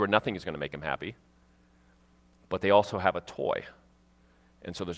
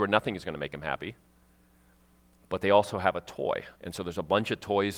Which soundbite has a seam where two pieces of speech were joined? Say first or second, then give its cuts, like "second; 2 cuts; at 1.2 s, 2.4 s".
second; 1 cut; at 3.7 s